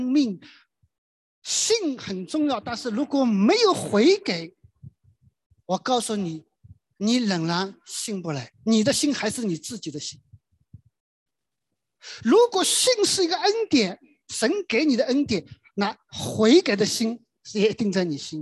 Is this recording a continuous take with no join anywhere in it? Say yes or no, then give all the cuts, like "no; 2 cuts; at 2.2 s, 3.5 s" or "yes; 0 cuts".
yes; 0 cuts